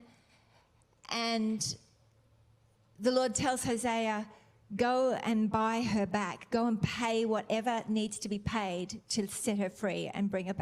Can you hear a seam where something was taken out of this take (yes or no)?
no